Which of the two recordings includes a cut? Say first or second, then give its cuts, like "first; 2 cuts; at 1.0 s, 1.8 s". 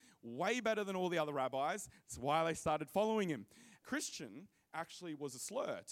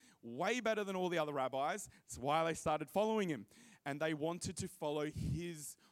first; 1 cut; at 3.8 s